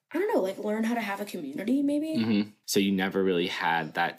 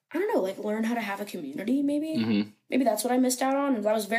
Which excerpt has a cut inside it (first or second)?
first